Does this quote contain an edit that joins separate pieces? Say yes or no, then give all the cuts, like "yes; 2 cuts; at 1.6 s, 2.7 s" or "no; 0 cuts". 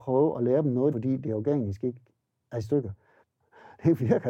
yes; 2 cuts; at 0.9 s, 3.2 s